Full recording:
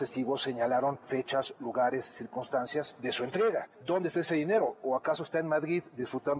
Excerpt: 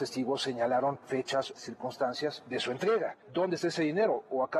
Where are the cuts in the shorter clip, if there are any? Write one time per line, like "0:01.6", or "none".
0:01.6